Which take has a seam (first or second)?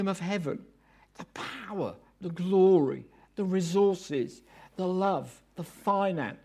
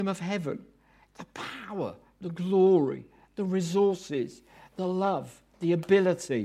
second